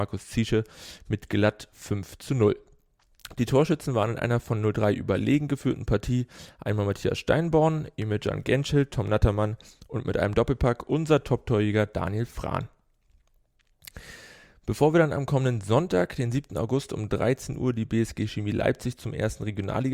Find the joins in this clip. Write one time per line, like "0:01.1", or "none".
none